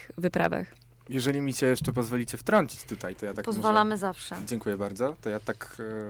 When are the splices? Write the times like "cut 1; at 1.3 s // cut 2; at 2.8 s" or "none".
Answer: none